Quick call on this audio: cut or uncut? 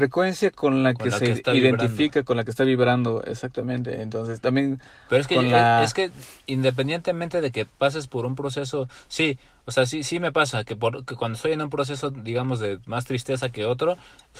uncut